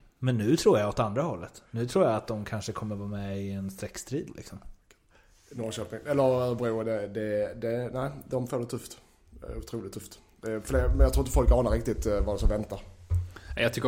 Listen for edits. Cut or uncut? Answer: uncut